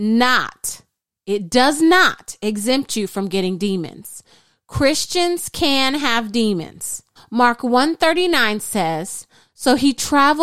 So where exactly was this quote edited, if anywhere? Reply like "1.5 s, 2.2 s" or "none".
7.2 s